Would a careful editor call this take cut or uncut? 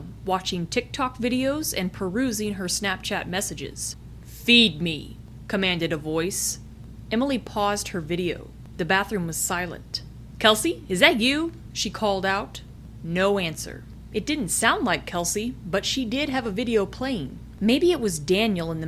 uncut